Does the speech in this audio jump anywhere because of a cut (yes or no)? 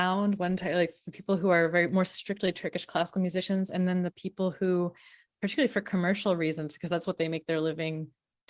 no